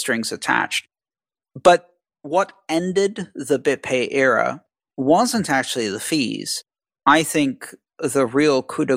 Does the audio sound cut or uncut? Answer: cut